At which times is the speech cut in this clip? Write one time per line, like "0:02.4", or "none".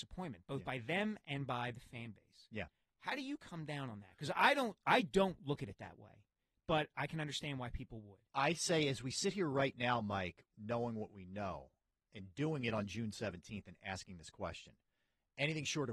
0:10.5